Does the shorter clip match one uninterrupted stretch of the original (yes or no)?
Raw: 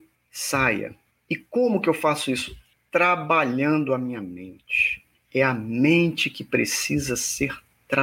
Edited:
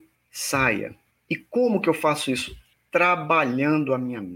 yes